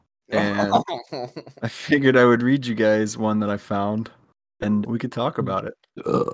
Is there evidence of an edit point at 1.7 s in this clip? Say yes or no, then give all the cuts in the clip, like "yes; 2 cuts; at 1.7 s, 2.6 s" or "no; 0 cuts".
no; 1 cut; at 4.8 s